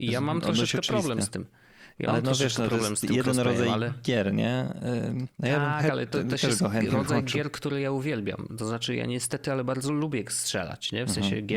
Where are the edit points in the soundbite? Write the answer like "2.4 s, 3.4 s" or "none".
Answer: none